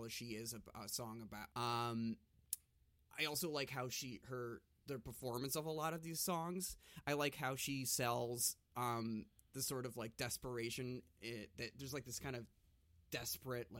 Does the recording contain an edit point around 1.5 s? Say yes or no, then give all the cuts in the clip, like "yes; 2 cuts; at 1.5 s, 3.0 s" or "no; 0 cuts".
yes; 1 cut; at 1.5 s